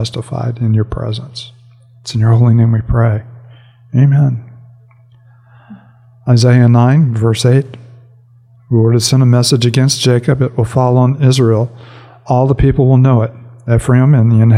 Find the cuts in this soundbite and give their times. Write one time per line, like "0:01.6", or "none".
none